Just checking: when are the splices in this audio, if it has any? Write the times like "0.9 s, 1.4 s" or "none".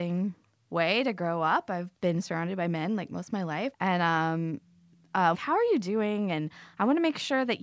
3.7 s, 5.3 s

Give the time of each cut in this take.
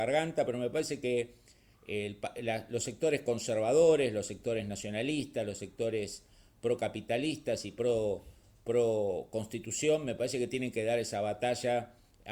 none

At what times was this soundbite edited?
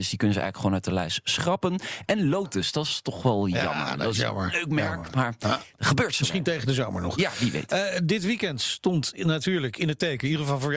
none

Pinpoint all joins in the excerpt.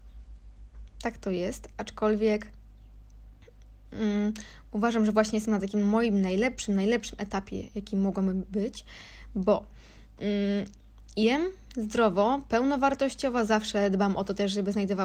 none

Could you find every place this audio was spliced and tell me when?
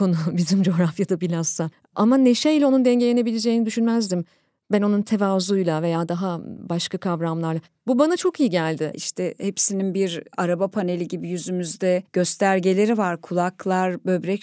8.9 s

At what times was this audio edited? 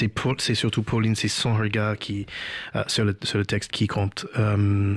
3.7 s

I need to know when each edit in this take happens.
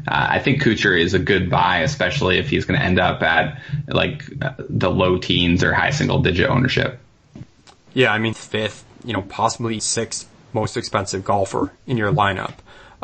8.3 s, 9.8 s

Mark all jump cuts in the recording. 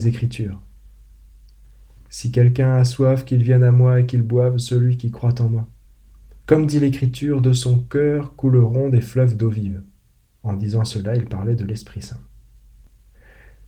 none

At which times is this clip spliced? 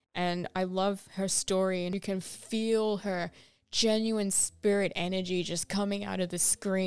none

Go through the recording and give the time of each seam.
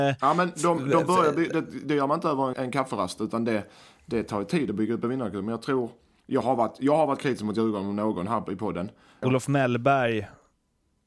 2.5 s, 9.2 s

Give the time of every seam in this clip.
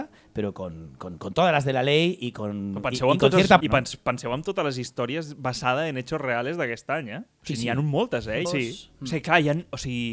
3.6 s, 8.4 s

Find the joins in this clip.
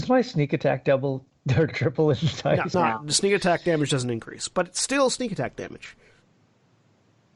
2.7 s

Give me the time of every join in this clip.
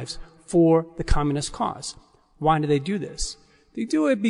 none

